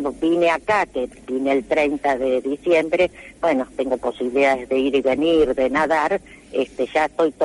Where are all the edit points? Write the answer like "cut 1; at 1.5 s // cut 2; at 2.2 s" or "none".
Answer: cut 1; at 3.7 s

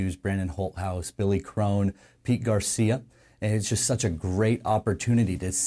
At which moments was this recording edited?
none

